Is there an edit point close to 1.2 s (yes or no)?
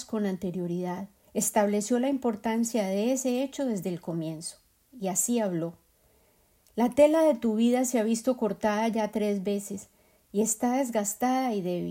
yes